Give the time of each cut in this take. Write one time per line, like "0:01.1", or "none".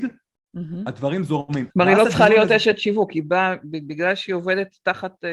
0:01.7